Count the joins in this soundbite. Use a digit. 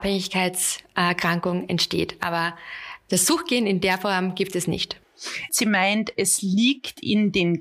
1